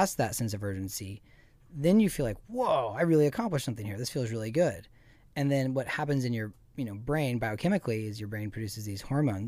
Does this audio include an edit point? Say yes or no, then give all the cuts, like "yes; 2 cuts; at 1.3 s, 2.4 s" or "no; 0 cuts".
no; 0 cuts